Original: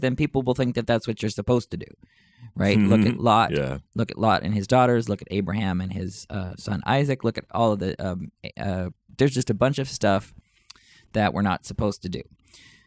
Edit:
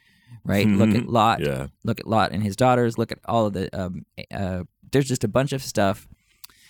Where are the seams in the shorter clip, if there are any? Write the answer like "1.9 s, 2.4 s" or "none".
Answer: 2.9 s